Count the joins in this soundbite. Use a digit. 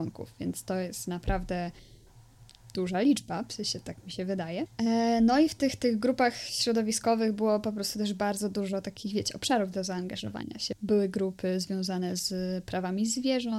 0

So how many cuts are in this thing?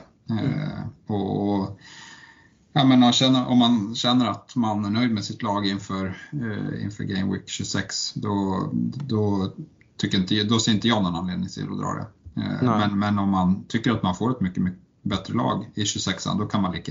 0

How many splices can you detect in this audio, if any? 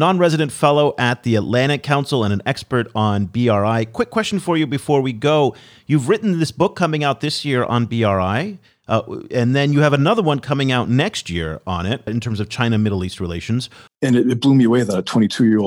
2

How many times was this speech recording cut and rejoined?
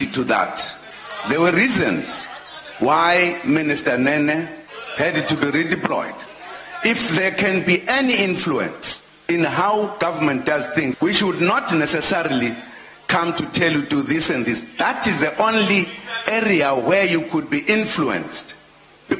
1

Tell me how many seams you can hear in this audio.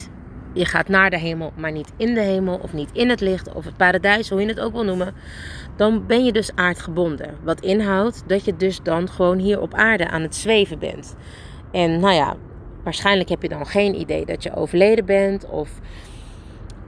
0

